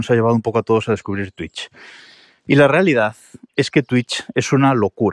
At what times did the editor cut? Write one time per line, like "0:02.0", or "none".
none